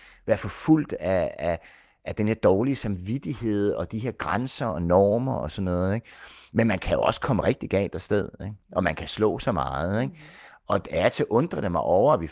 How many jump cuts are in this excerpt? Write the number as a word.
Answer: zero